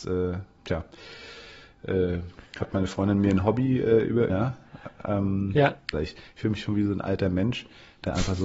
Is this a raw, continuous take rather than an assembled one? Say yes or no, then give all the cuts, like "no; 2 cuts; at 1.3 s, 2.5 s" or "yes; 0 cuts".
no; 2 cuts; at 4.3 s, 5.9 s